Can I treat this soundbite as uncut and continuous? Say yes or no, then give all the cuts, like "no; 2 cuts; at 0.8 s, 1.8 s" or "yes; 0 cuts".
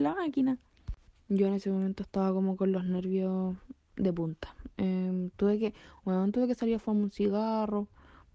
yes; 0 cuts